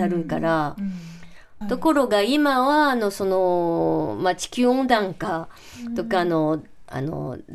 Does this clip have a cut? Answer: yes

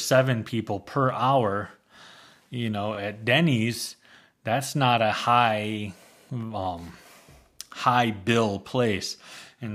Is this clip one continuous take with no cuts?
yes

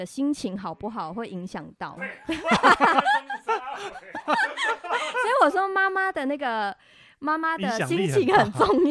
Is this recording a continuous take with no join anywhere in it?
no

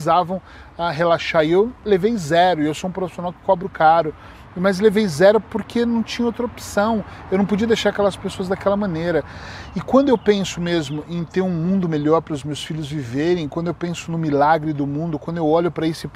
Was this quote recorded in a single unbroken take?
yes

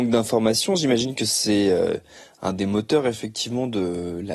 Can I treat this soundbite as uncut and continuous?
yes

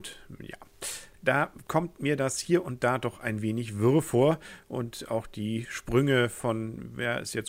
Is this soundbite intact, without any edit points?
no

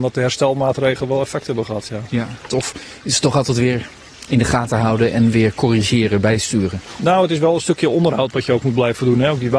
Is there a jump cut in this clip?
yes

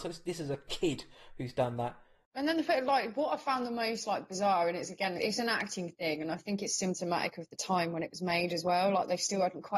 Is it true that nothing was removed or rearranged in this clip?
no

